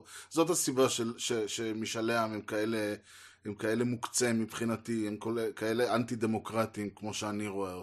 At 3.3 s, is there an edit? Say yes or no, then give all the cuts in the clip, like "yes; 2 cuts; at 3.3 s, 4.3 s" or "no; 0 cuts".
no; 0 cuts